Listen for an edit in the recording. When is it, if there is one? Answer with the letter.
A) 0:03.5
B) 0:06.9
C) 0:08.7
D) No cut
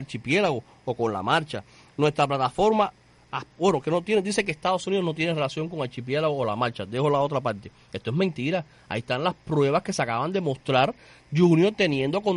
D